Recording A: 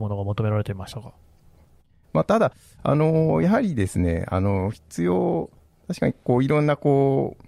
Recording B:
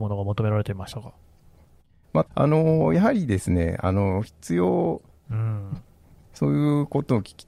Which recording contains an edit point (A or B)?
B